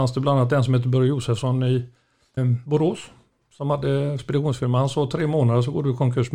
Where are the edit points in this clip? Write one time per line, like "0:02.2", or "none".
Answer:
0:02.4